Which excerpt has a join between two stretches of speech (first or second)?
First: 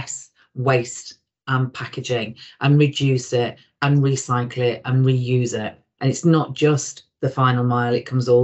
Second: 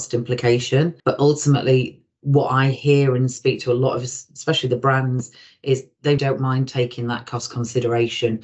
second